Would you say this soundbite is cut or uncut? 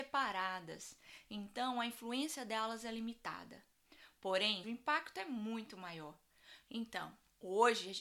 cut